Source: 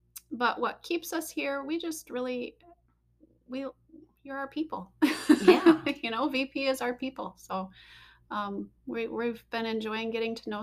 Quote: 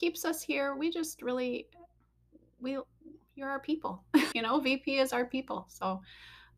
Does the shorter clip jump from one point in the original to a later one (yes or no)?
yes